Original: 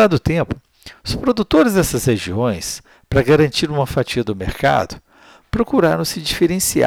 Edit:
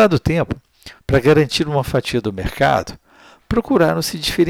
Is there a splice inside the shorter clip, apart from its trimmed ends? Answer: yes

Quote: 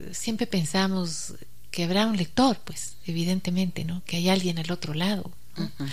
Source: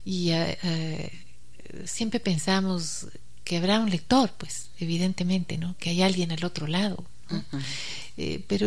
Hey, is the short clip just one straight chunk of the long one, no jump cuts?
yes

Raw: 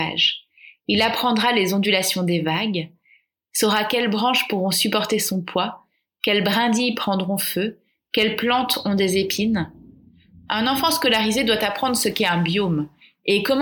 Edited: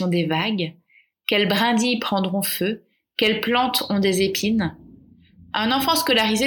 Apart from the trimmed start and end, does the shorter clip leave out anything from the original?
yes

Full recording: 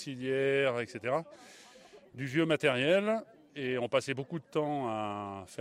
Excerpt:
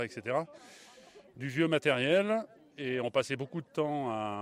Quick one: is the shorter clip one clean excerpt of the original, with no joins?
yes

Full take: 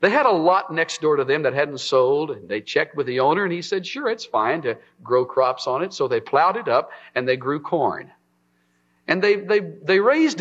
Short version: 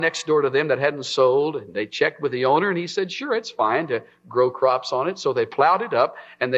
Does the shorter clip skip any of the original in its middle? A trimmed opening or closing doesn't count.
no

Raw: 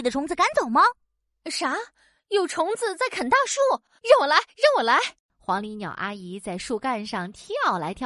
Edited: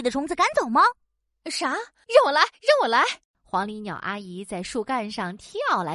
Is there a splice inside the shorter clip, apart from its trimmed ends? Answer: yes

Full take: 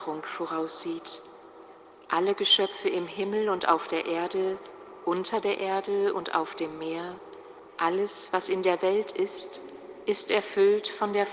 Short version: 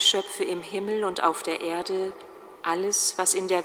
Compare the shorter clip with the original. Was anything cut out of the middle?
yes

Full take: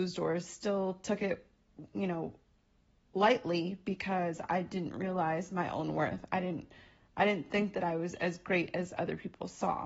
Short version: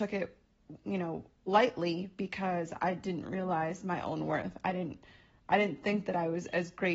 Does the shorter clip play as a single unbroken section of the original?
no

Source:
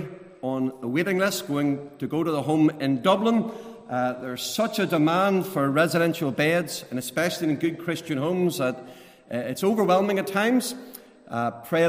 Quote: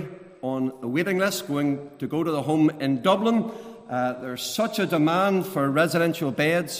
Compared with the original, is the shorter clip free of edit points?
yes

